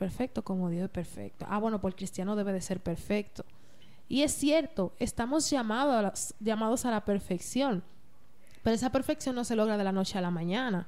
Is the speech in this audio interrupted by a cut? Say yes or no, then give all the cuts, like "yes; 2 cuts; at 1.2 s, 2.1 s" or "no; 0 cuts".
no; 0 cuts